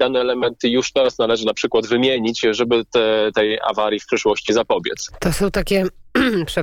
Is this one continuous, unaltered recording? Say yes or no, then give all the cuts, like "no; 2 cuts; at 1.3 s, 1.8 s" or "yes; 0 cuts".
yes; 0 cuts